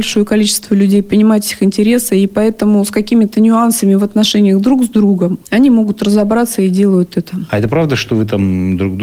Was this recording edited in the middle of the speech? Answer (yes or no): no